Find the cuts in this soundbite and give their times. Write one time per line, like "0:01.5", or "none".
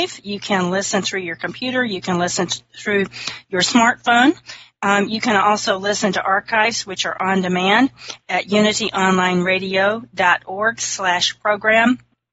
none